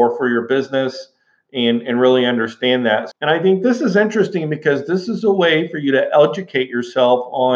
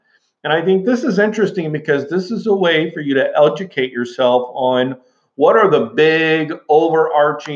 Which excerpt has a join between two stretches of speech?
first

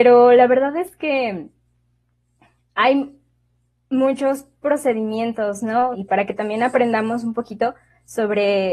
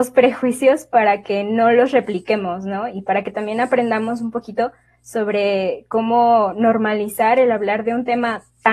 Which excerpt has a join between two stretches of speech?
first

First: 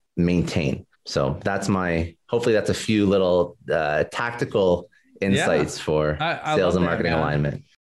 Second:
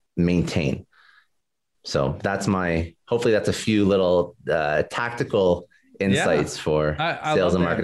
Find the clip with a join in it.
first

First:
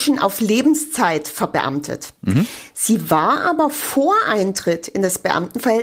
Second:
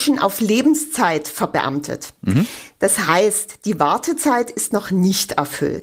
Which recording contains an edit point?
first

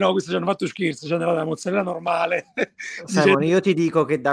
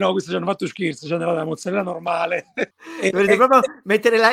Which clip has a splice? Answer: second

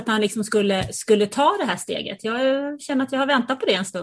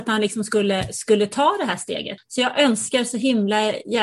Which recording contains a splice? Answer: second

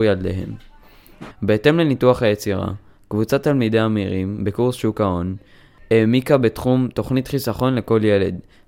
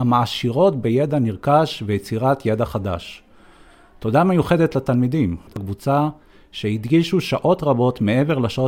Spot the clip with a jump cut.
first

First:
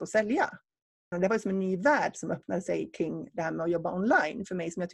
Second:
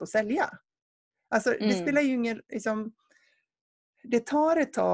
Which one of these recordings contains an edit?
first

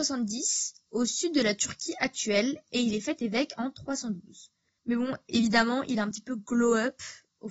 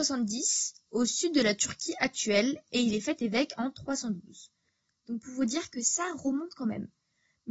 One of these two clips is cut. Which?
first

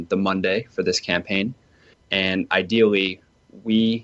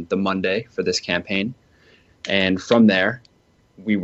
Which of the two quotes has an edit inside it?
first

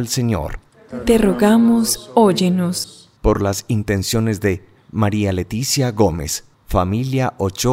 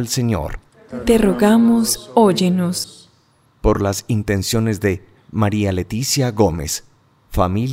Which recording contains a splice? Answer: first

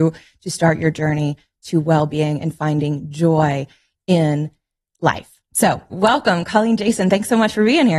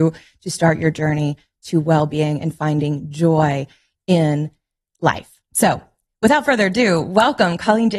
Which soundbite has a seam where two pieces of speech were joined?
first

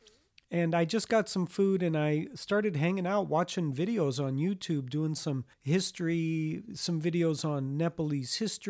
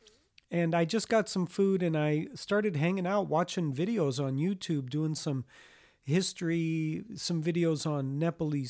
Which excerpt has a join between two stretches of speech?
first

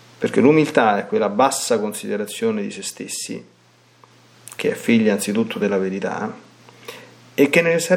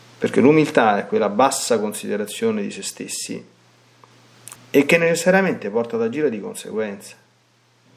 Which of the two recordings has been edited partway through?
second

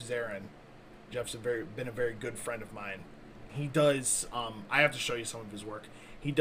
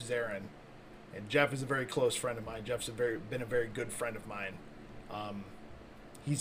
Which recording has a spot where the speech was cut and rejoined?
first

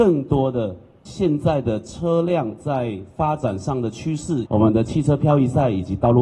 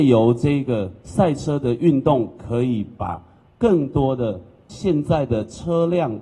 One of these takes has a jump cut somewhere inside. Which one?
first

